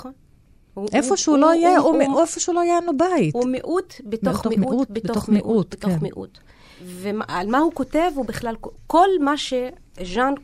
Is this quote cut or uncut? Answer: uncut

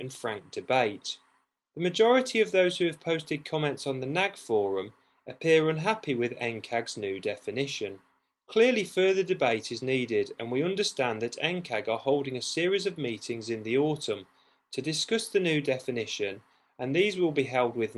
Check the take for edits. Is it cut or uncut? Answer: cut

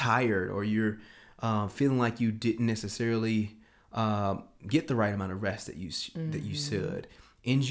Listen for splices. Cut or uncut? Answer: uncut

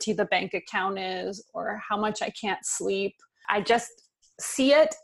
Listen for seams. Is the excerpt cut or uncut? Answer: uncut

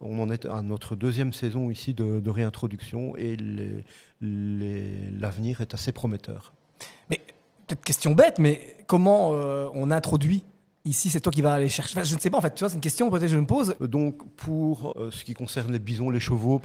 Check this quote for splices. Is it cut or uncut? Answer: cut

